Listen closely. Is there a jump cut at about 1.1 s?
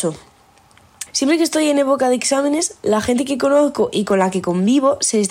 yes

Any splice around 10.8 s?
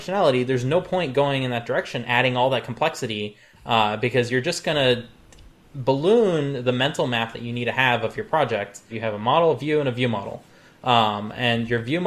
no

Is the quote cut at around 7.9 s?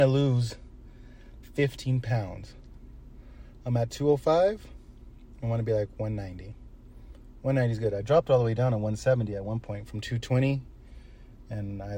no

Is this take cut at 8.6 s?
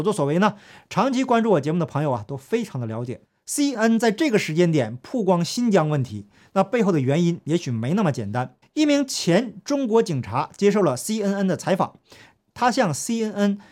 yes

